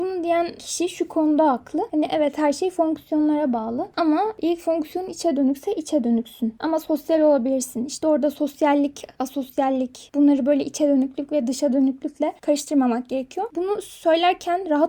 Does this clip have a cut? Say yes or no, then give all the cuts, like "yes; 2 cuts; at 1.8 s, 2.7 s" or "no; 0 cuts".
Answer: no; 0 cuts